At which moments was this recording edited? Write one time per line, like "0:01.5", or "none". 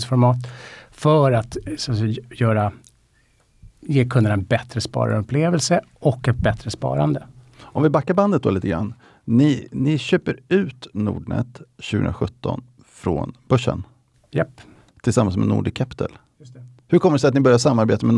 none